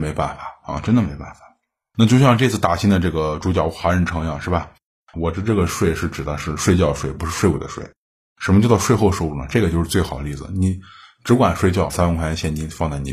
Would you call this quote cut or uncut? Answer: cut